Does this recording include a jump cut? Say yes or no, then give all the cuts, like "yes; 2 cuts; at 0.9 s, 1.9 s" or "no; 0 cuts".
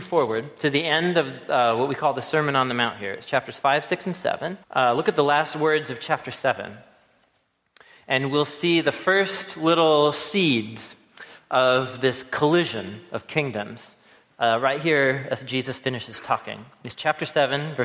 yes; 1 cut; at 4.6 s